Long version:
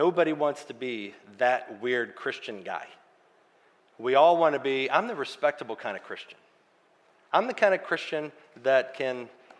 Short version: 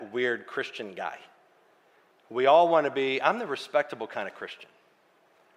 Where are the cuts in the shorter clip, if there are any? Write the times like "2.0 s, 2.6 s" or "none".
none